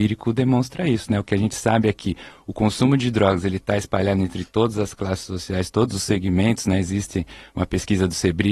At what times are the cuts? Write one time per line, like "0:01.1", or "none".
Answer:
none